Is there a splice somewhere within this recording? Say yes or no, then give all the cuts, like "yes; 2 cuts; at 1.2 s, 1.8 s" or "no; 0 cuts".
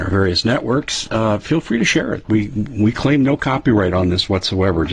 no; 0 cuts